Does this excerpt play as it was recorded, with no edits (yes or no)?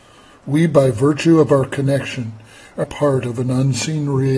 no